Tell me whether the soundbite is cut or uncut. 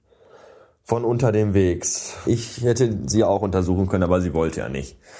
cut